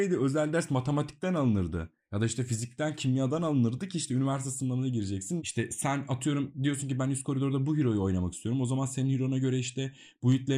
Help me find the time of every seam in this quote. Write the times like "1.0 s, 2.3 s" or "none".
5.4 s